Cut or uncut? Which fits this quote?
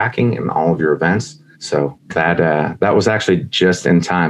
cut